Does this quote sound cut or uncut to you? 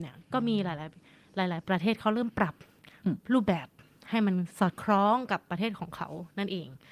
cut